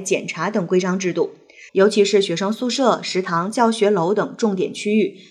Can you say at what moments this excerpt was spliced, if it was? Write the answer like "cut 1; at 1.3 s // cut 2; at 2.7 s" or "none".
cut 1; at 1.7 s